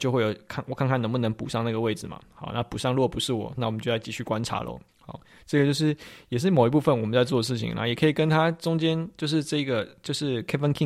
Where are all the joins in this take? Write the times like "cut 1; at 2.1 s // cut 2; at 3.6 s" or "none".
cut 1; at 4.9 s